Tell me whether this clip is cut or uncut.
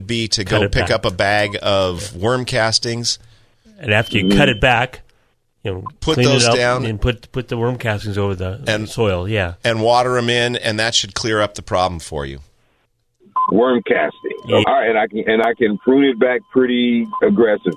cut